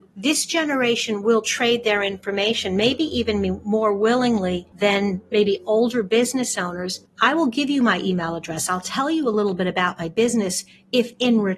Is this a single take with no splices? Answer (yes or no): yes